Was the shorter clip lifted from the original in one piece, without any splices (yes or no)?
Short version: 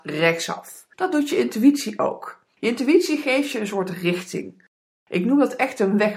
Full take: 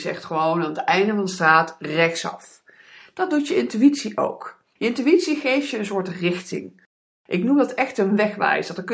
no